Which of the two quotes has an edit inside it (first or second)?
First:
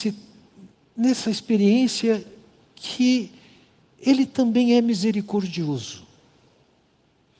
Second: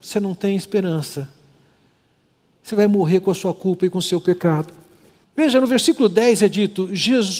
second